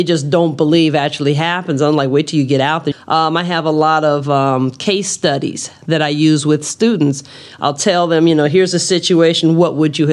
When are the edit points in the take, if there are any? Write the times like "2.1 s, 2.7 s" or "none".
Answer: 2.9 s